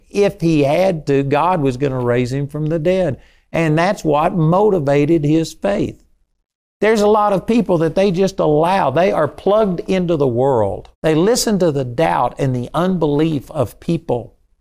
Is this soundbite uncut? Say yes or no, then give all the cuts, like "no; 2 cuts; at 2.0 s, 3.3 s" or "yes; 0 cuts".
no; 1 cut; at 10.9 s